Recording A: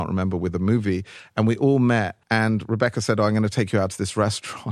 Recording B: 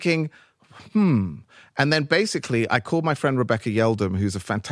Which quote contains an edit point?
A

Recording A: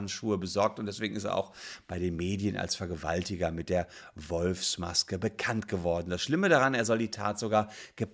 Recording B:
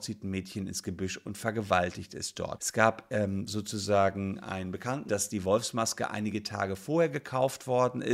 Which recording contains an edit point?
B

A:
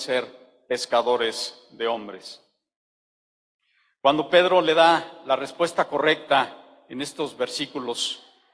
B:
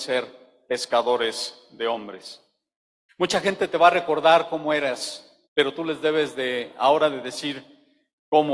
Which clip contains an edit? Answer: B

